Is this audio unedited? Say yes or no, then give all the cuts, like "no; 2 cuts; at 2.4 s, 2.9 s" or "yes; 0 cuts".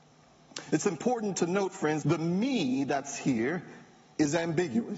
no; 1 cut; at 2.0 s